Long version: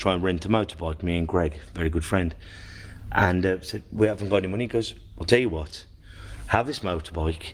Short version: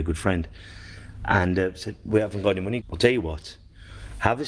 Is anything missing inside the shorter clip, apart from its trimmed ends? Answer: yes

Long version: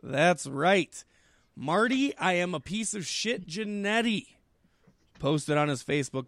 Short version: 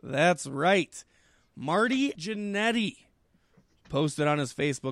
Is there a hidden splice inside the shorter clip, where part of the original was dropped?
yes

